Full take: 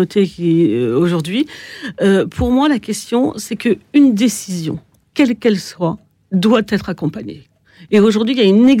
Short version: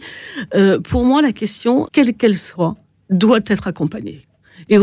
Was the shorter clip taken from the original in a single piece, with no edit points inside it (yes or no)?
no